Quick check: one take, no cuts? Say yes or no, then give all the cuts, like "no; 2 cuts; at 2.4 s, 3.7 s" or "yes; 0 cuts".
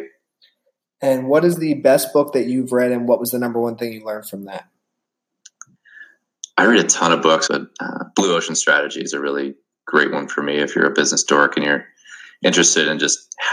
no; 1 cut; at 7.5 s